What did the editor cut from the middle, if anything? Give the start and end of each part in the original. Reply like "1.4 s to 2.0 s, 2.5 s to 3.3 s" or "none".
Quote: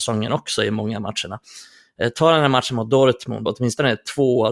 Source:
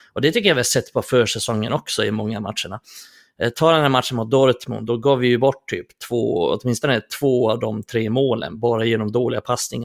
4.9 s to 6.5 s